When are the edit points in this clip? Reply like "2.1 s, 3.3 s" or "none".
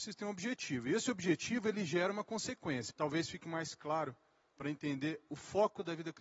2.9 s

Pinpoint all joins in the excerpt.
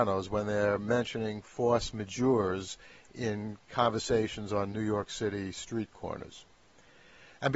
none

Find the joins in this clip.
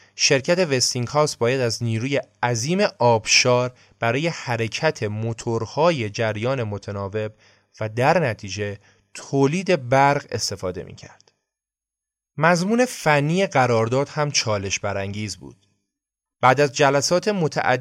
16.3 s

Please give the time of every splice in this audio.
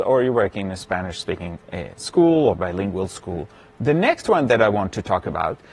3.7 s

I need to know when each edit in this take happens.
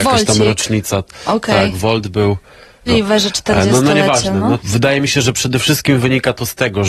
2.9 s, 4.6 s

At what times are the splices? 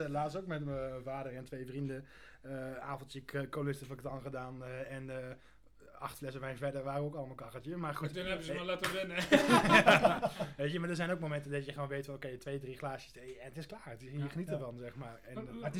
none

